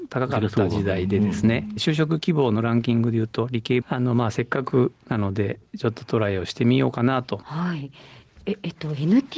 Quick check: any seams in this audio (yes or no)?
yes